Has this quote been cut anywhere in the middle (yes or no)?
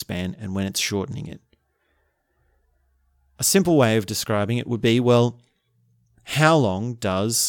no